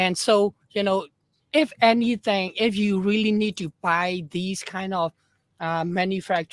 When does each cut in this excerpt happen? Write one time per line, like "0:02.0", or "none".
none